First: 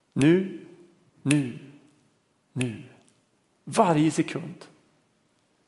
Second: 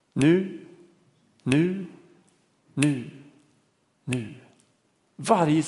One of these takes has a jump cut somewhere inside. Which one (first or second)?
first